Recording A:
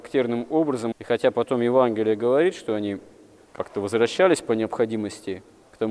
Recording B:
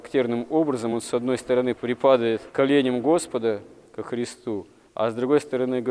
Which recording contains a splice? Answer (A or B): A